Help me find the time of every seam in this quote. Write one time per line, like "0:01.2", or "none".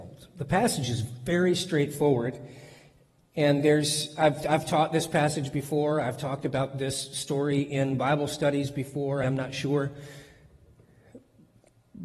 0:09.2